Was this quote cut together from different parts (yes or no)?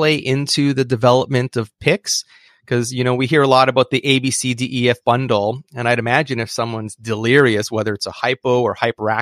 yes